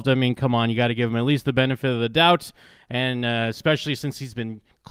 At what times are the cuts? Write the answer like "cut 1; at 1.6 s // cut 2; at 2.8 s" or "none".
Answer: none